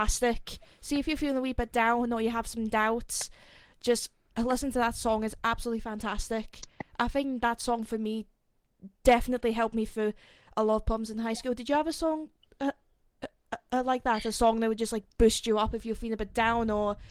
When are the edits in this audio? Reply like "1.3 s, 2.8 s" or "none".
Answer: none

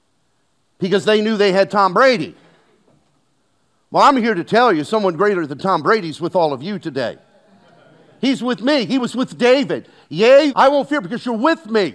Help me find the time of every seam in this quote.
10.5 s

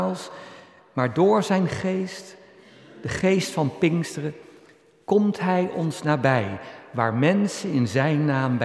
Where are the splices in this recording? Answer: none

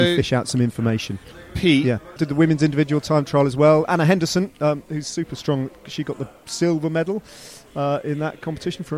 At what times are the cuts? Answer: 2.2 s

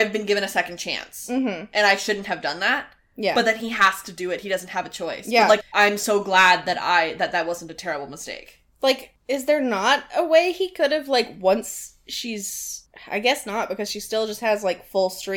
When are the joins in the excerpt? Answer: 5.6 s

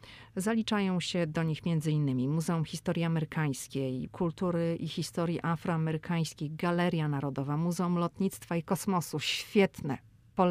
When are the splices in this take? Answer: 4.1 s

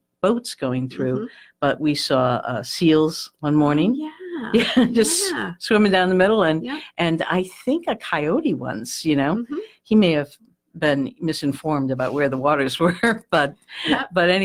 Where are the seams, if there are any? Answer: none

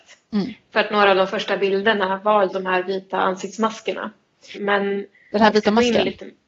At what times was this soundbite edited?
2.5 s, 4.5 s

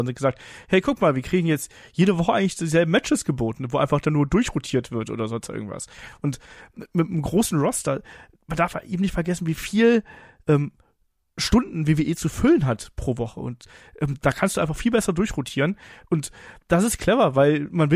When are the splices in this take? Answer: none

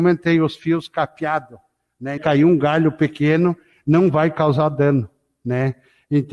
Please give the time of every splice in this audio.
2.2 s

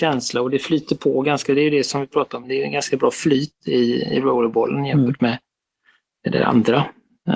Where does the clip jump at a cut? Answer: none

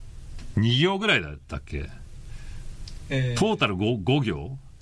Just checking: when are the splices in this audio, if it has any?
none

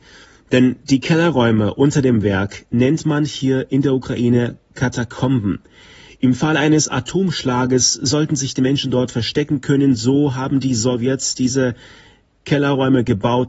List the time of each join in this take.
none

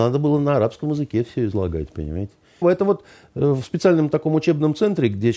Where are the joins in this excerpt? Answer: 2.6 s

